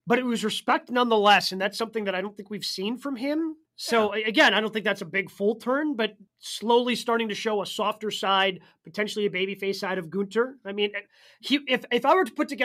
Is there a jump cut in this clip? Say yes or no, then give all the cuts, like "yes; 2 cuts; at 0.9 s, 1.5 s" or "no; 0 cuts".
yes; 2 cuts; at 3.7 s, 6.3 s